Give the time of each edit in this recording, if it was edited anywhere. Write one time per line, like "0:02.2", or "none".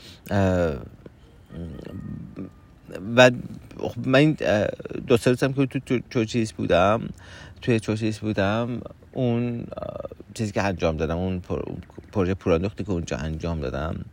none